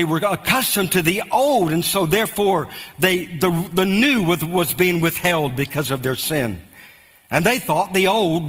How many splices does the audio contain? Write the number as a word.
zero